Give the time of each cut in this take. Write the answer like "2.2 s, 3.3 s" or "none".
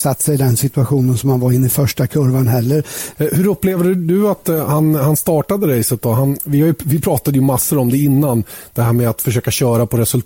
3.2 s, 6.4 s